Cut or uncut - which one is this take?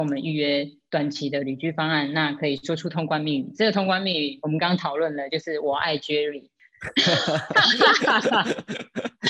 uncut